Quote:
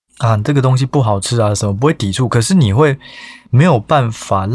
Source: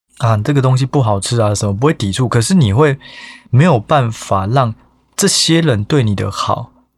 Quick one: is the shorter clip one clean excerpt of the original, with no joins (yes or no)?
yes